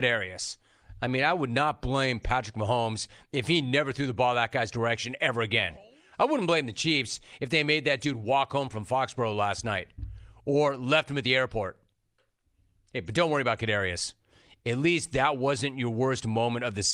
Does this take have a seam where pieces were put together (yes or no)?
no